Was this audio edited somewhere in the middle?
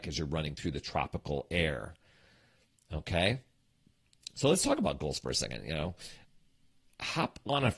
no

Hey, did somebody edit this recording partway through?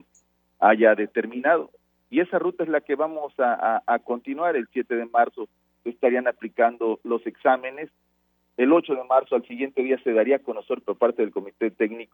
no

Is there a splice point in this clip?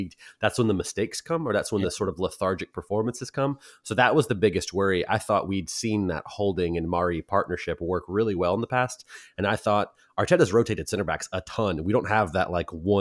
no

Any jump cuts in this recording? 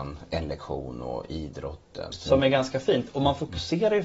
yes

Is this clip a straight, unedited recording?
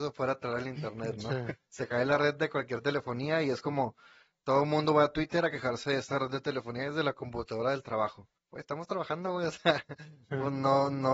no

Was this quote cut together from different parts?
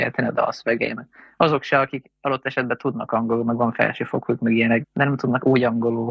yes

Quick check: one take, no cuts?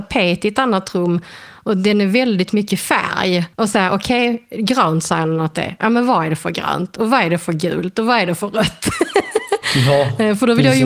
no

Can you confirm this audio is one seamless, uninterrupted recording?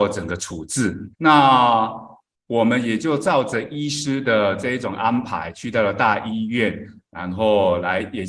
no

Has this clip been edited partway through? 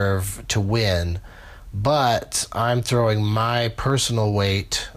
no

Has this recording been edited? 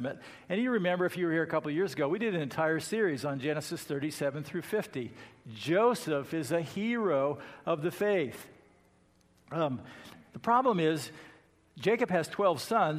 no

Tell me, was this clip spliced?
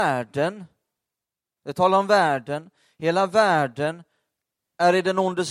no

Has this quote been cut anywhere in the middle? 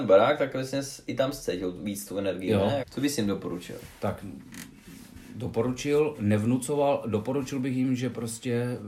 yes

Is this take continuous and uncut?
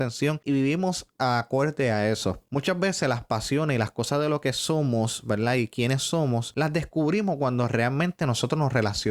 yes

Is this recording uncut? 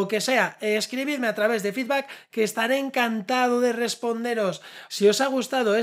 no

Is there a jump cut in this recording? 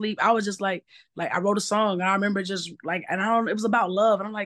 no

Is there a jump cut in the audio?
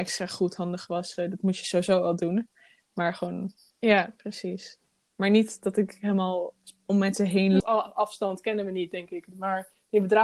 yes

